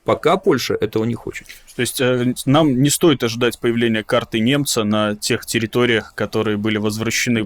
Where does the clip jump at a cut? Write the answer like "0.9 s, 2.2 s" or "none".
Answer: none